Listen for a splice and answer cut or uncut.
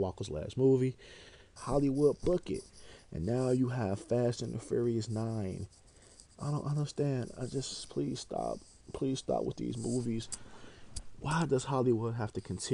cut